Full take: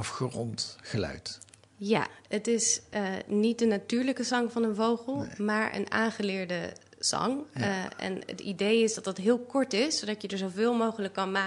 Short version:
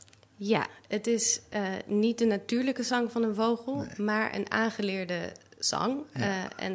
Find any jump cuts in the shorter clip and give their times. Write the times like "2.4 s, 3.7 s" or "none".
none